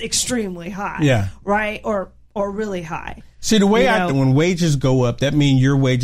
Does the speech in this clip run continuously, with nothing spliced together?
no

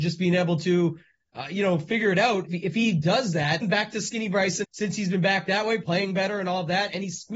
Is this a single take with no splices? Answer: no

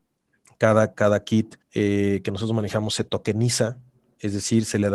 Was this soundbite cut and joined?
yes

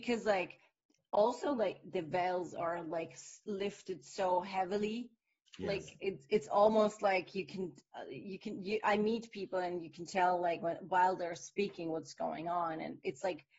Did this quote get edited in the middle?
yes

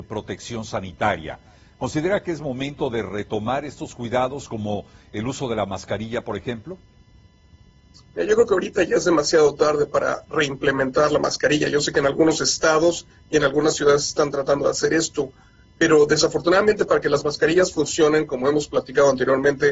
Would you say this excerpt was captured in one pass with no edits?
yes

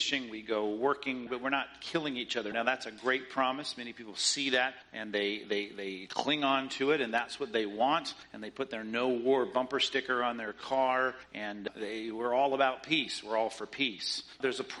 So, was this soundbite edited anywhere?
yes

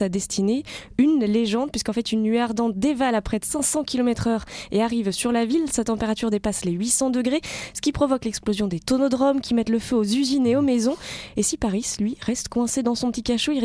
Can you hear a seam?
no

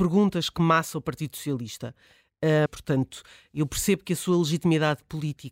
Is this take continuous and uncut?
no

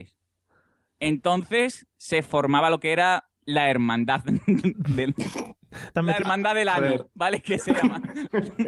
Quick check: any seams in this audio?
yes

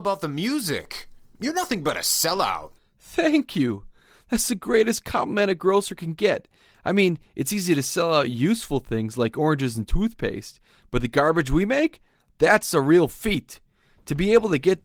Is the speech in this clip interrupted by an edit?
no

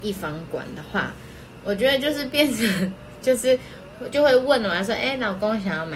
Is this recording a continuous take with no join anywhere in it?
yes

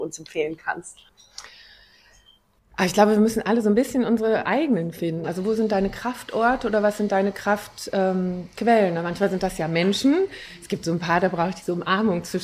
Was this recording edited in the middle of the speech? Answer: yes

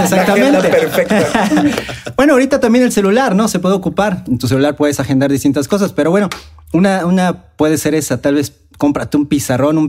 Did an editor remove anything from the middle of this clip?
no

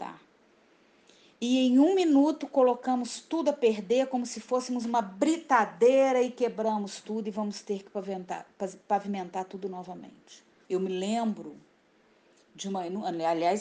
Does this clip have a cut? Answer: yes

